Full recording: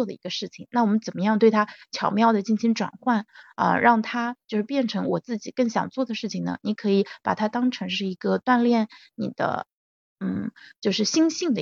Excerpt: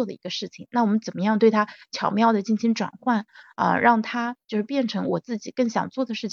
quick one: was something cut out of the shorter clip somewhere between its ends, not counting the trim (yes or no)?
no